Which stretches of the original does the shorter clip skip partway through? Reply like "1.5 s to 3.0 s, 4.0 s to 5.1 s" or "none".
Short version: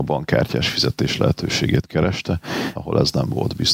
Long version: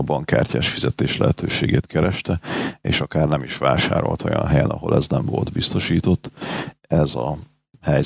2.8 s to 4.7 s

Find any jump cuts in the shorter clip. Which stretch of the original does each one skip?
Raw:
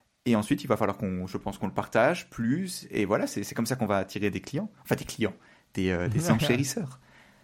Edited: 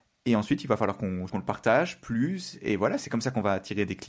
1.3 s to 1.6 s, 3.3 s to 3.5 s

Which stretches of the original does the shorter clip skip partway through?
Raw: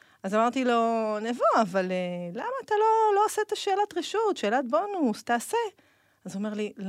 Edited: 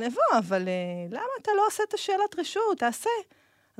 2.8 s to 3.1 s, 4.4 s to 5.2 s

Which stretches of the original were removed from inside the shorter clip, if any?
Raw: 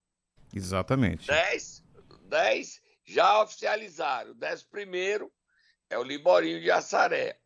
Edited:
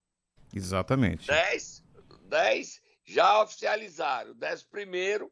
none

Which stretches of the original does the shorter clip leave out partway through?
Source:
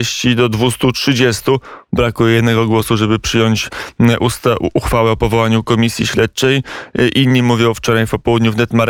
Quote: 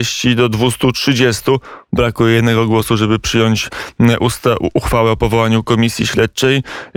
none

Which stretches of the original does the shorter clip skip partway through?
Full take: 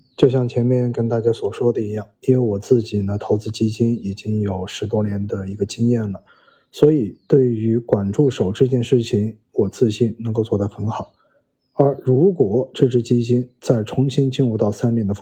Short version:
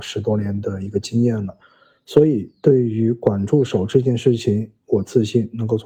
none

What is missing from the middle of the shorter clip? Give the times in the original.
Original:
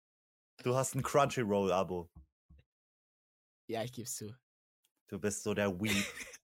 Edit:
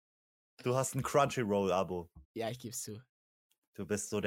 2.2 s to 3.6 s

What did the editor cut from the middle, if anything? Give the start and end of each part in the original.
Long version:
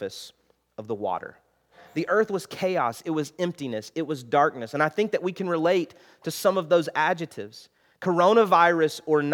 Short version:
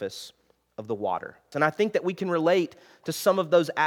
1.5 s to 4.7 s

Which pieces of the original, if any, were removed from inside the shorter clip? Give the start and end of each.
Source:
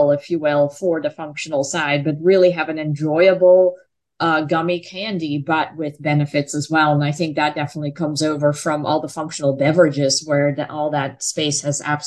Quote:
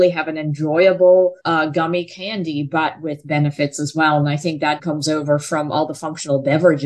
3.8 s to 4.2 s, 7.5 s to 7.9 s

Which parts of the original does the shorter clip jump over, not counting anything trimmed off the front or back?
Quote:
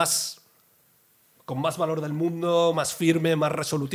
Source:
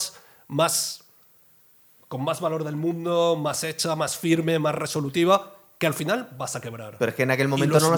3.4 s to 4.0 s

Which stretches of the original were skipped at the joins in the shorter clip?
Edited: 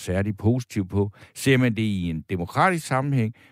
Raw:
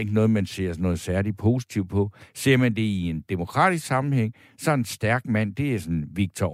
none

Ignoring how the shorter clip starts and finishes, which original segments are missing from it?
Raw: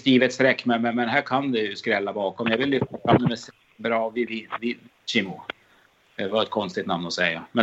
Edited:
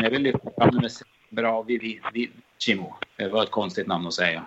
5.5 s to 6.1 s

